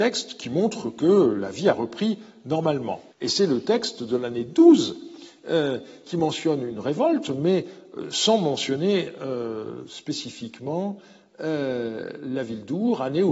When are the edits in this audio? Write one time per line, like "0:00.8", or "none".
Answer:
0:03.1